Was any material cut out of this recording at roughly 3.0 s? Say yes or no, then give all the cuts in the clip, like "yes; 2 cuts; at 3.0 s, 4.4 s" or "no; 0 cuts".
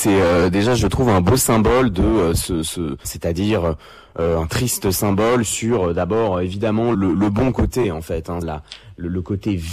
yes; 3 cuts; at 3.0 s, 6.9 s, 8.4 s